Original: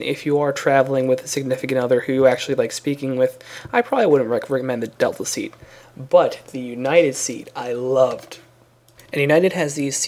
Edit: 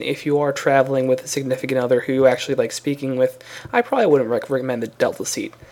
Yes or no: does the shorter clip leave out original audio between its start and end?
no